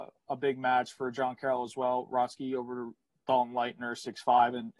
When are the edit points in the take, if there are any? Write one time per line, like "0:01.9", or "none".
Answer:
none